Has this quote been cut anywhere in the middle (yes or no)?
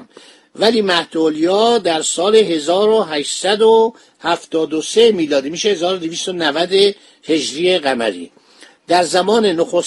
no